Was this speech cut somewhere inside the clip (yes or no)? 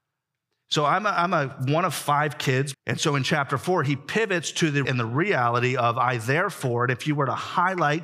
yes